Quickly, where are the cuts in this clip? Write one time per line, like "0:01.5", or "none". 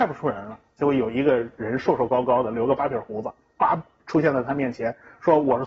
none